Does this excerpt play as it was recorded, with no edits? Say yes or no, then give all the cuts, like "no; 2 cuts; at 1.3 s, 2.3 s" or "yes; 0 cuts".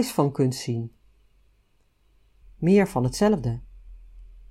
no; 1 cut; at 2.4 s